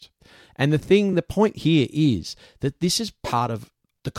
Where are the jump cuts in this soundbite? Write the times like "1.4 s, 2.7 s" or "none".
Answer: none